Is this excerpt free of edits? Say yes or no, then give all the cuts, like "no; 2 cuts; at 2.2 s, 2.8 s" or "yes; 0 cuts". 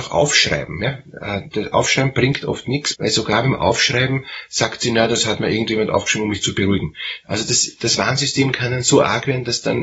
no; 1 cut; at 2.9 s